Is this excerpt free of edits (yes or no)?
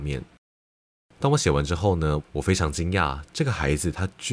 no